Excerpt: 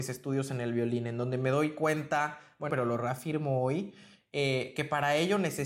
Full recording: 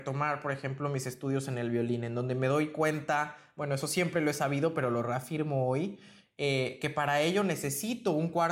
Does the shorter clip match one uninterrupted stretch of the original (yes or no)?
no